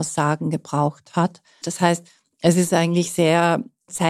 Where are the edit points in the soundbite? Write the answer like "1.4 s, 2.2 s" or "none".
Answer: 1.6 s